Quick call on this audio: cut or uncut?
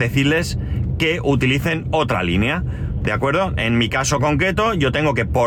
uncut